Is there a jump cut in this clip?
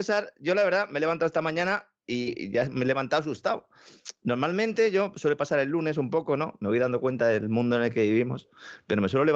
no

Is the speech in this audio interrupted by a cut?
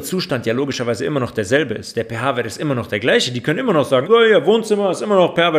yes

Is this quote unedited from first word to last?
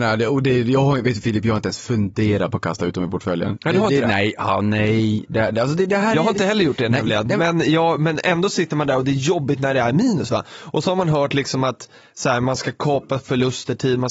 yes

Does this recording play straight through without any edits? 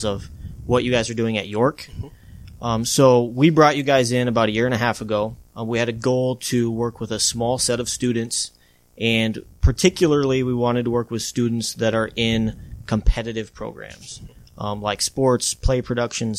no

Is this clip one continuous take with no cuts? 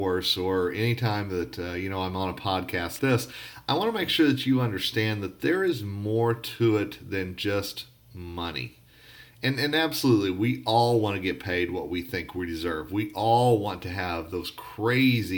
no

